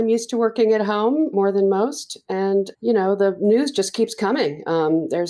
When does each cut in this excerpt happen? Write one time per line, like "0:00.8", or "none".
0:01.3
0:02.7